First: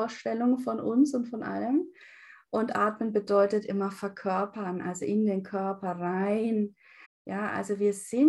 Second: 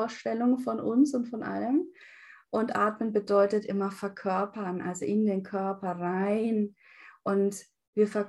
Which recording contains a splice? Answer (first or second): first